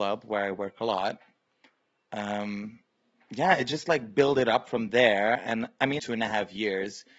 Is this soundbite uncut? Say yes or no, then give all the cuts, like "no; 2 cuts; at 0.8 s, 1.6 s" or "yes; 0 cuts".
no; 1 cut; at 6.0 s